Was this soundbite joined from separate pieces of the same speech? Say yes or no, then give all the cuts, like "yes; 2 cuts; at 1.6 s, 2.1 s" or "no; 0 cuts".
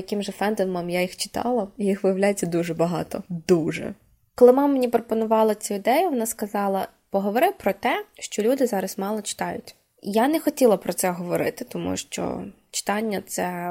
no; 0 cuts